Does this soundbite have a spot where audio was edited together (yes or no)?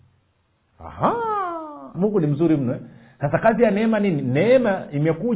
yes